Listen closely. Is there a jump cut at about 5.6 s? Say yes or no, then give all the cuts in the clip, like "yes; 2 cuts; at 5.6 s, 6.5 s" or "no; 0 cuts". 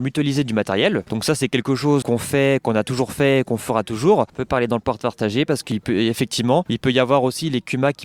no; 2 cuts; at 2.0 s, 4.3 s